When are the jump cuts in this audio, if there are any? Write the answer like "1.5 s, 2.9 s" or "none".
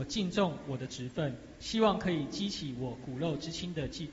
none